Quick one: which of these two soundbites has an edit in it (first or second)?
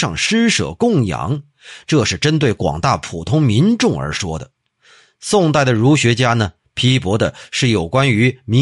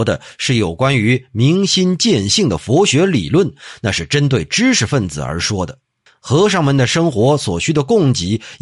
second